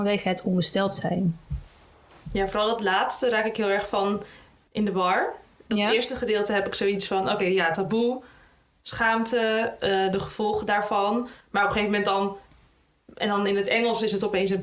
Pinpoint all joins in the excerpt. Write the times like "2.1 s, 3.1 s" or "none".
none